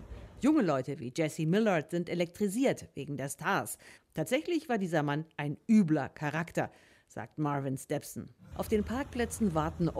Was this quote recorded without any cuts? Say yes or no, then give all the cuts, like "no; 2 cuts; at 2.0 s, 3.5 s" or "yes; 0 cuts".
no; 2 cuts; at 4.0 s, 8.5 s